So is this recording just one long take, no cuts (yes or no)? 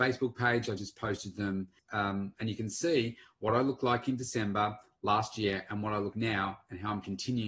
no